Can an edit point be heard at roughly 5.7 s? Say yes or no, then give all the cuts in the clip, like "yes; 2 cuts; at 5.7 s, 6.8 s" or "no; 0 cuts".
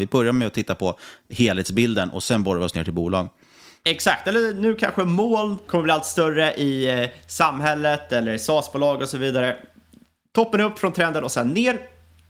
yes; 1 cut; at 5.7 s